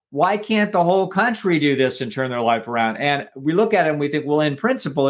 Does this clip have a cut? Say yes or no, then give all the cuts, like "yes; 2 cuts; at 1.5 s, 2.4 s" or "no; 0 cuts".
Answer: no; 0 cuts